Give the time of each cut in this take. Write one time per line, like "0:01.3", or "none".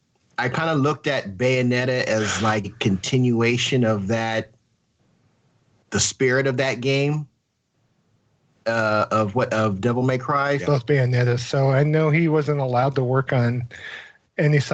0:02.6
0:10.6